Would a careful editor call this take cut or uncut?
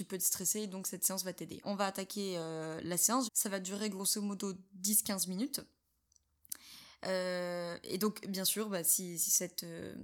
cut